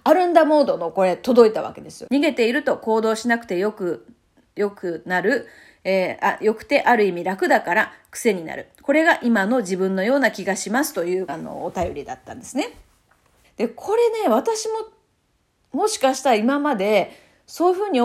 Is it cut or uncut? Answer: cut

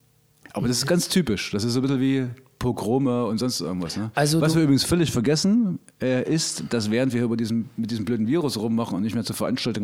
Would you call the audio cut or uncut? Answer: uncut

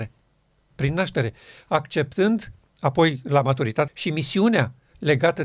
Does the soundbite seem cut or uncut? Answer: cut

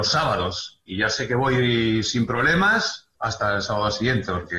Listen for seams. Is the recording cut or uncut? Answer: cut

